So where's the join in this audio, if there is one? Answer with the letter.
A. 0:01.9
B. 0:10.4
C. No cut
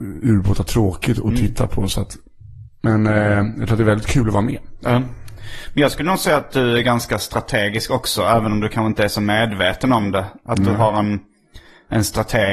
B